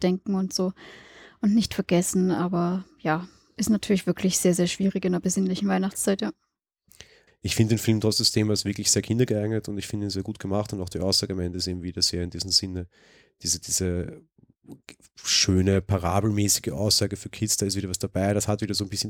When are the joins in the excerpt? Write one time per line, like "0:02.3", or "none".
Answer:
0:07.3